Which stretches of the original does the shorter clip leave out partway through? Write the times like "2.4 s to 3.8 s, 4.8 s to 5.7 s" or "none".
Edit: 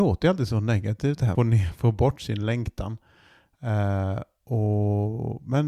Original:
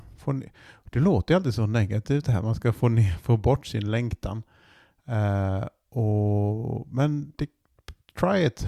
2.4 s to 2.8 s